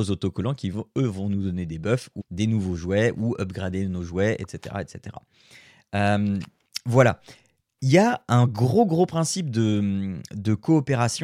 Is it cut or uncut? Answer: cut